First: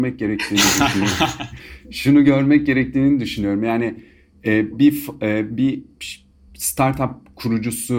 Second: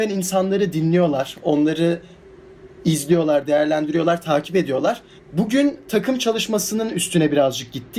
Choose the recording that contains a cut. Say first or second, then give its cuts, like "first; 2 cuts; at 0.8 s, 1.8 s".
second; 1 cut; at 5.2 s